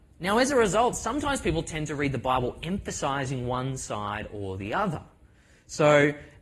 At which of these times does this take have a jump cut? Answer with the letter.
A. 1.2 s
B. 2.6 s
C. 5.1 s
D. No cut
D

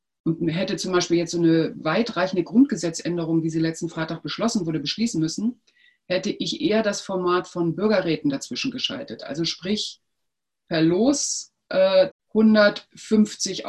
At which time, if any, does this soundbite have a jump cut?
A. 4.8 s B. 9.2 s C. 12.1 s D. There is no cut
C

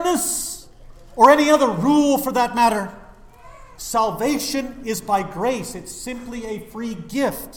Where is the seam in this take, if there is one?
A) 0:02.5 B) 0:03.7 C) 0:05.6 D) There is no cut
B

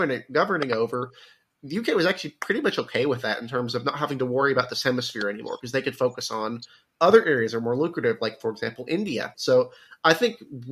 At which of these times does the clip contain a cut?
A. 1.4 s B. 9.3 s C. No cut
B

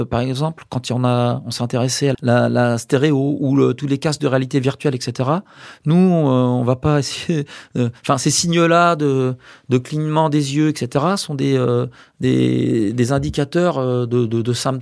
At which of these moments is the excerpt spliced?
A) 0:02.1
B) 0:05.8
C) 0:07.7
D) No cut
A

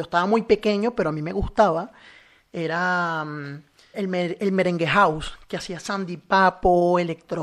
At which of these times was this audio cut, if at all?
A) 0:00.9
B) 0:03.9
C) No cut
B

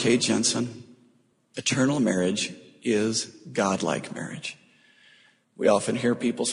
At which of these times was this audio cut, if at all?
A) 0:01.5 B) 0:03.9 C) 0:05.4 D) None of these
C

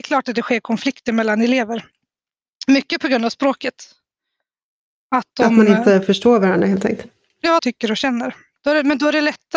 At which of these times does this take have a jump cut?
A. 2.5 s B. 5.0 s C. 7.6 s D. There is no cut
C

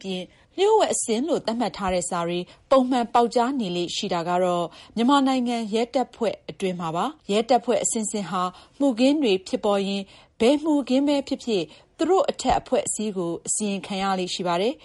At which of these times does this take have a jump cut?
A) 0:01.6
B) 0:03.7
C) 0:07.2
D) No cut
C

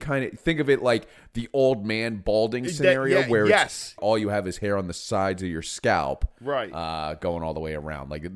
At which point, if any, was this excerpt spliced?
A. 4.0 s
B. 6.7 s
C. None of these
A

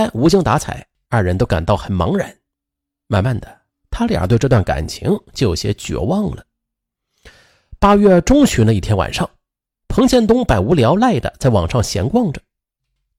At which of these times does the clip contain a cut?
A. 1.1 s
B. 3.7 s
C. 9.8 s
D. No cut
A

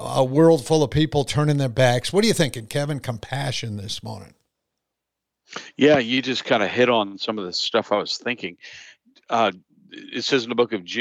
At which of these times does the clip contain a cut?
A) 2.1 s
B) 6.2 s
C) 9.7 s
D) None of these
D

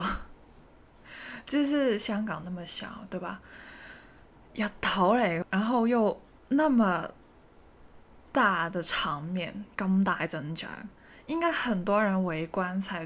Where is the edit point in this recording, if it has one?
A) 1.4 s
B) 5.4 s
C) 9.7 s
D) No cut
B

